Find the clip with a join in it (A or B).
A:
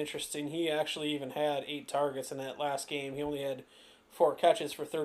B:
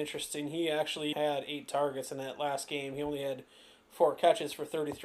B